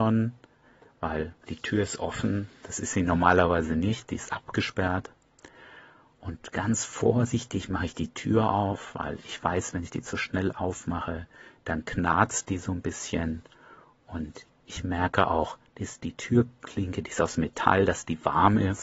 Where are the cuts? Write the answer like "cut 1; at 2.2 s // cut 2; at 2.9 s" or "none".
none